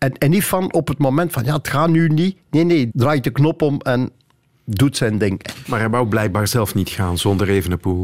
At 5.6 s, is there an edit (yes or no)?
yes